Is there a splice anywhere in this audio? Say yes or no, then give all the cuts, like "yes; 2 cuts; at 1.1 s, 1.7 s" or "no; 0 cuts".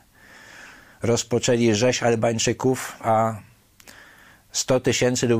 yes; 1 cut; at 3.0 s